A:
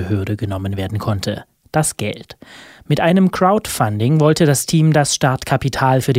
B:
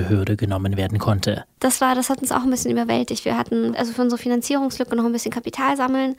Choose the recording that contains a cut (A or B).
B